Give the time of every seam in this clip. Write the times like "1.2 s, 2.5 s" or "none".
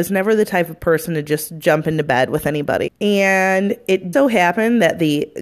2.9 s, 4.1 s